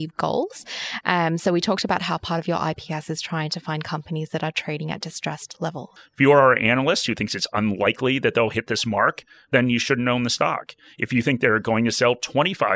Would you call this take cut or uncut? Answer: cut